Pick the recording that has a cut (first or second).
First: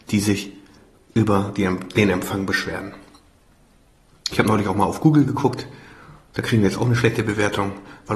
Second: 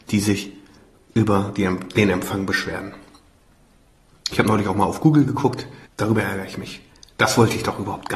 second